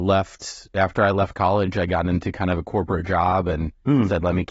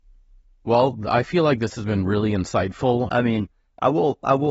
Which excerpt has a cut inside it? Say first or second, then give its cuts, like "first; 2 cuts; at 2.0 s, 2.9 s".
second; 1 cut; at 3.1 s